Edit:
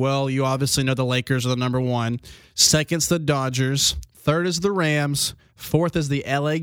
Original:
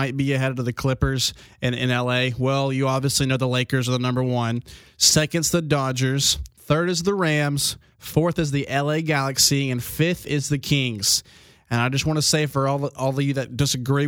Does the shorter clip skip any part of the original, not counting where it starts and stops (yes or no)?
no